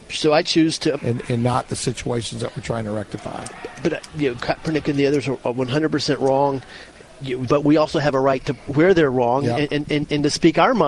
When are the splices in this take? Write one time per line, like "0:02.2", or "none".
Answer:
0:01.0
0:07.5
0:08.7

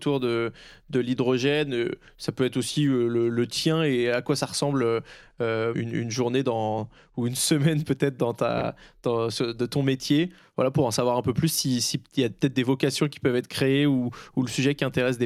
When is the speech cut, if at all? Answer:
0:05.7

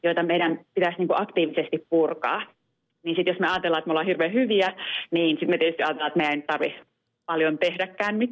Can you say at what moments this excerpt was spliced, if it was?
none

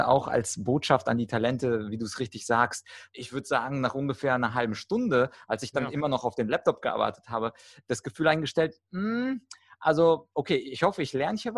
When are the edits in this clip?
0:03.1

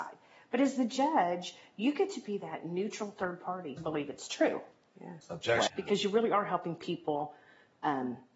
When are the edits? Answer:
0:03.8
0:05.7

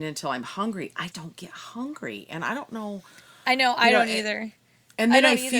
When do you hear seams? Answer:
0:01.1

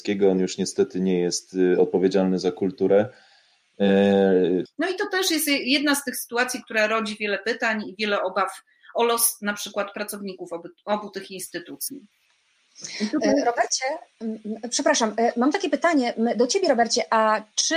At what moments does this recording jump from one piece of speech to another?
0:04.7

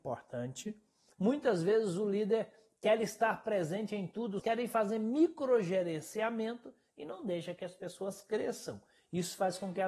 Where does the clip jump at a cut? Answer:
0:01.1
0:04.4

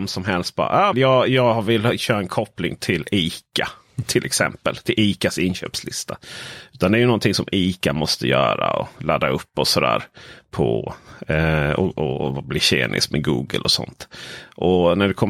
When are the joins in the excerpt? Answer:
0:00.9

